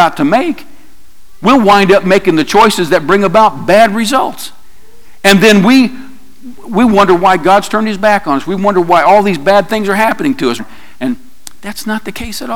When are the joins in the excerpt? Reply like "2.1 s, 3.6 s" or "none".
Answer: 10.6 s